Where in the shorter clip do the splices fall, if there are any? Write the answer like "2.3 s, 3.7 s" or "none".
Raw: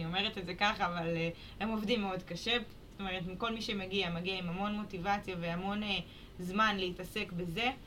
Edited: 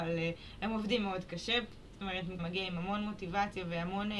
2.4 s

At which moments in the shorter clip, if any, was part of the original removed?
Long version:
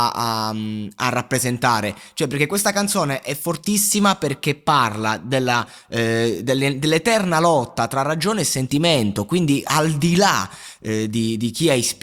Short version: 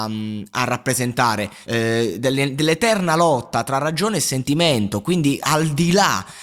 1.6 s

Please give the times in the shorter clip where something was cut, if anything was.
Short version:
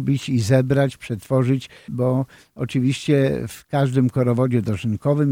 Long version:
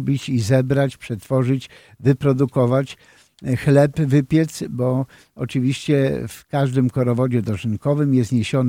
1.9 s

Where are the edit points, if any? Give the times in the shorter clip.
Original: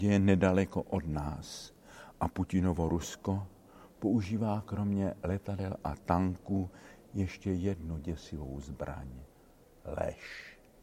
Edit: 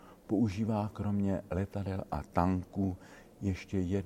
none

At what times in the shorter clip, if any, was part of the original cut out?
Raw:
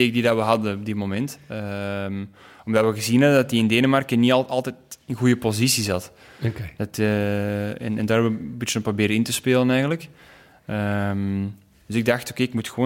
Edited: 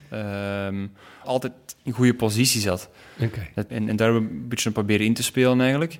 1.2 s, 3.7 s

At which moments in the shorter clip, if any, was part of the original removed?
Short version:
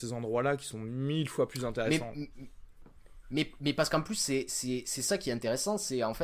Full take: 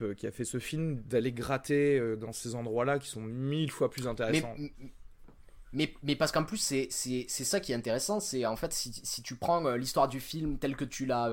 none

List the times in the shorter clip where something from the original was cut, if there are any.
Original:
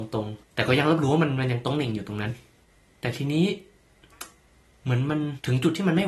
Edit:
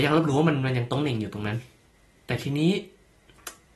none

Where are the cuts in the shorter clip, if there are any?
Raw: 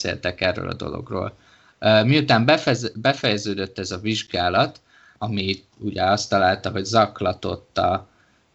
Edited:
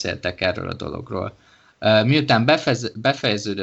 none

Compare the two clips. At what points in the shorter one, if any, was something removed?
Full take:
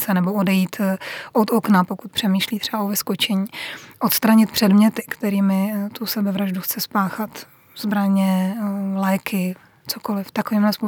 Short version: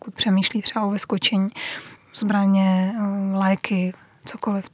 2.0 s

